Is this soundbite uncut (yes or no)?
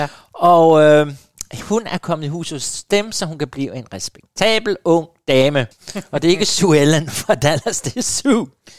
no